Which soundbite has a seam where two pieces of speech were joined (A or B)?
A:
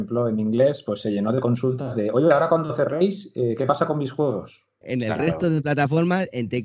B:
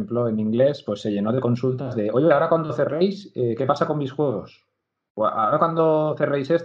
A